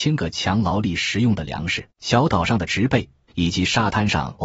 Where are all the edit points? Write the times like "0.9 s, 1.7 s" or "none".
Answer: 1.9 s, 3.3 s